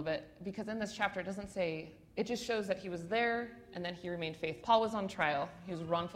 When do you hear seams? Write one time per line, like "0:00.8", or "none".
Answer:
0:02.1
0:04.6

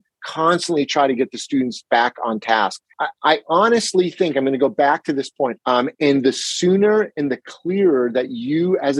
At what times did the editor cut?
0:02.9
0:05.6

